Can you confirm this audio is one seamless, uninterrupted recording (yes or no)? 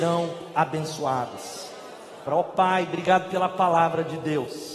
no